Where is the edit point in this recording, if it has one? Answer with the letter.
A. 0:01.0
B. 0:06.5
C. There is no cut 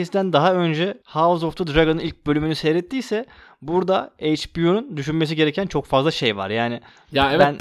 A